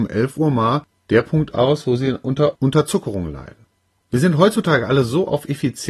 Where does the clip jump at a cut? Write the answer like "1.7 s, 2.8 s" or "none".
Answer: 4.0 s